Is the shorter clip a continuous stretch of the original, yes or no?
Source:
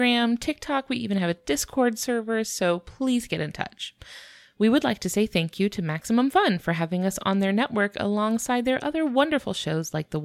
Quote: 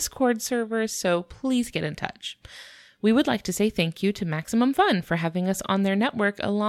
yes